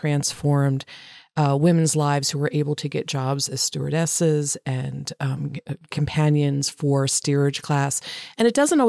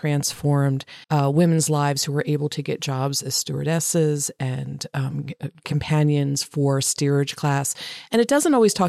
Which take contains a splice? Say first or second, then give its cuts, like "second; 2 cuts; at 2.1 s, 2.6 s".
second; 1 cut; at 1.0 s